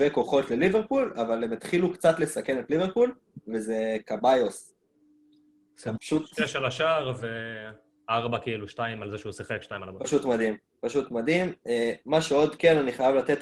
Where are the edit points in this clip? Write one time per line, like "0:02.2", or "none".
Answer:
0:06.0

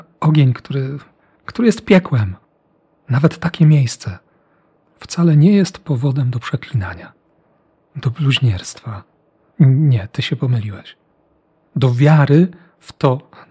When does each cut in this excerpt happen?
0:09.5

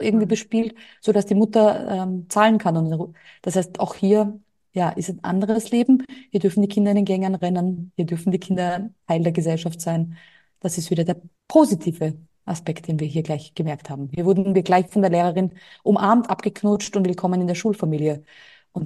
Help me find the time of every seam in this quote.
0:11.4

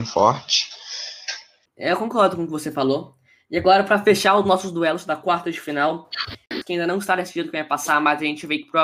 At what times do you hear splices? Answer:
0:01.7
0:06.6

